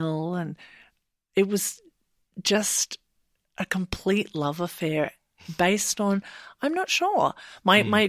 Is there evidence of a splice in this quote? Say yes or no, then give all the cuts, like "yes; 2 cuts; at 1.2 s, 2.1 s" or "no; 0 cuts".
no; 0 cuts